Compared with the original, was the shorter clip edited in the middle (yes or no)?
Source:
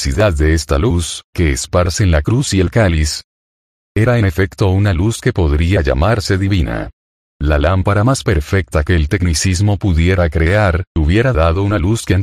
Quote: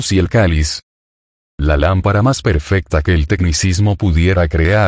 yes